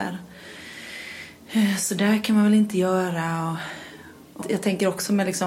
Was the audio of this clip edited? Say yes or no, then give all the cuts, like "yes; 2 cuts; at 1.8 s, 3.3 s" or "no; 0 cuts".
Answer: yes; 1 cut; at 4.4 s